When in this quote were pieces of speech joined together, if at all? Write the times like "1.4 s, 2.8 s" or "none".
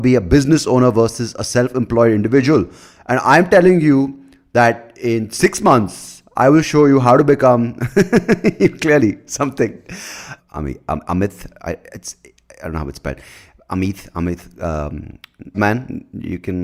10.4 s, 15.5 s